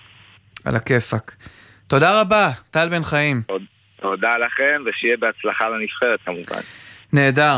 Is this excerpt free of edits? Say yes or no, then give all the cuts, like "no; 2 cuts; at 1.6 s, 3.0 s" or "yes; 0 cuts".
yes; 0 cuts